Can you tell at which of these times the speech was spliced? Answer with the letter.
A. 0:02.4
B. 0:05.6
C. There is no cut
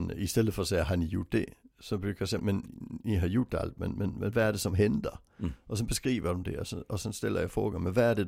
A